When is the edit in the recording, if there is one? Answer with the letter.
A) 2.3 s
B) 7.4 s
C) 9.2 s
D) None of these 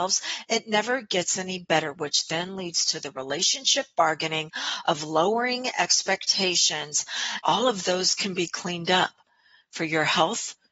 B